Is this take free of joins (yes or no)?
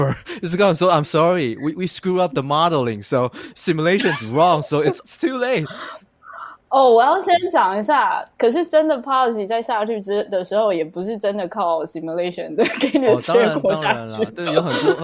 no